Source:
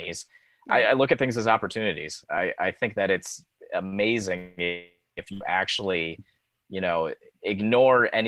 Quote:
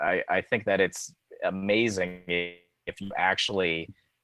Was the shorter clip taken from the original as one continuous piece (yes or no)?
yes